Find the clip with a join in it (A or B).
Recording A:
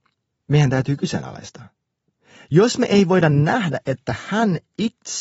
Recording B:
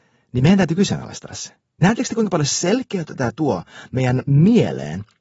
B